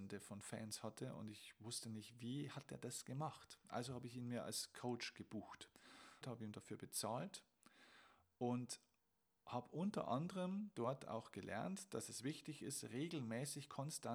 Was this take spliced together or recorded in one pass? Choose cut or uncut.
cut